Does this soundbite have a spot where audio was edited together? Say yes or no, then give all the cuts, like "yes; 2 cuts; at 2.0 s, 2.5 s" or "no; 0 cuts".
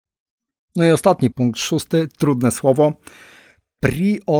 yes; 1 cut; at 1.3 s